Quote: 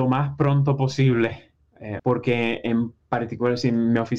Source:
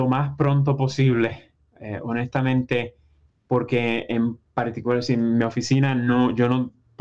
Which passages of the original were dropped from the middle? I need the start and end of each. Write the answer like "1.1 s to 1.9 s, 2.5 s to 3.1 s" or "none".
2.0 s to 3.4 s